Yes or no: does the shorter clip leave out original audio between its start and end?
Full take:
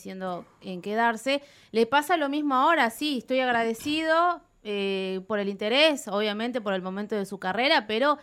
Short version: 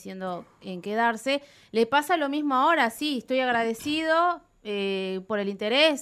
no